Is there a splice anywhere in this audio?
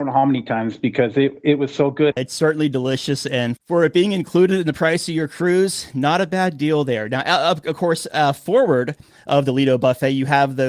yes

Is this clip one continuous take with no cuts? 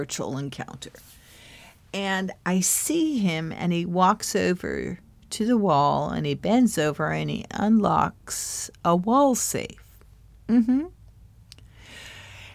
yes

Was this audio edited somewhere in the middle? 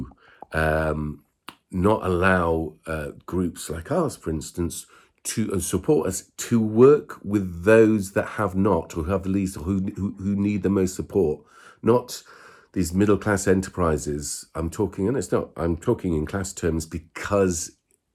no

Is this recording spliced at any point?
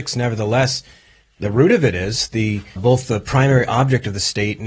yes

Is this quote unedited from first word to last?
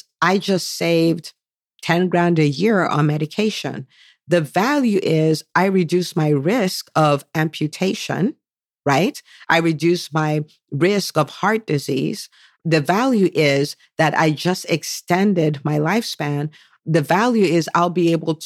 yes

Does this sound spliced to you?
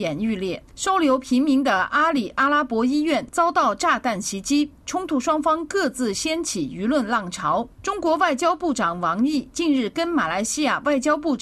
no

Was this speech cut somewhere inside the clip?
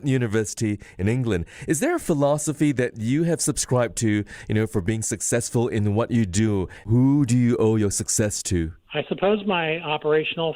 no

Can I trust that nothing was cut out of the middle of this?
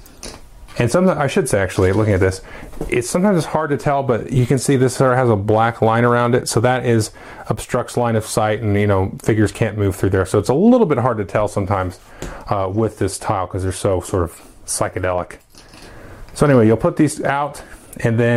yes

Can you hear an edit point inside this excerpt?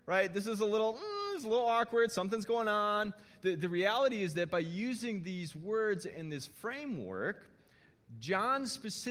no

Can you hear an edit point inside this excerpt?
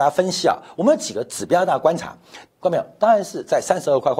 yes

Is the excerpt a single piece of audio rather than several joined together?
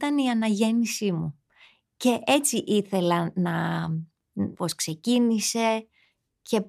no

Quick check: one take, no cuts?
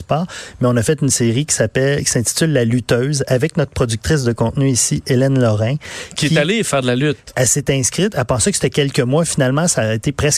yes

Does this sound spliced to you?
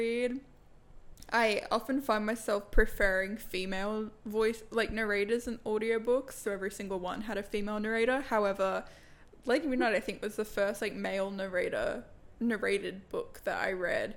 yes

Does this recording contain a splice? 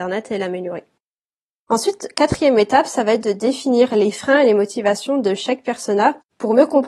no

